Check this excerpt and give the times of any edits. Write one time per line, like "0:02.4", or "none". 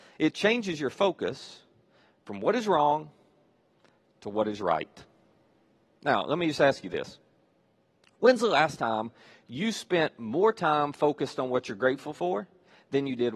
none